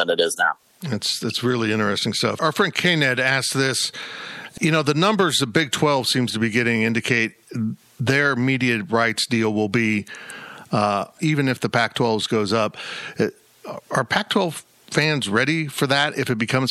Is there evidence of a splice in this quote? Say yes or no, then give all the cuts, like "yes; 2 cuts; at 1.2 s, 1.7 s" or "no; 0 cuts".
yes; 1 cut; at 11.2 s